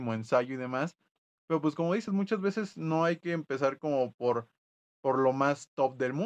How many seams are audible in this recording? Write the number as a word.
zero